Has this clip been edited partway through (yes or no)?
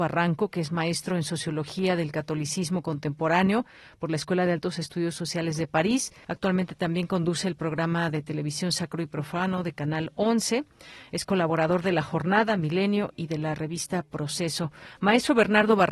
yes